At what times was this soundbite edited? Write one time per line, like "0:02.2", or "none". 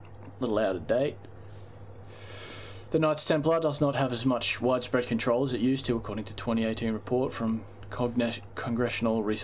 none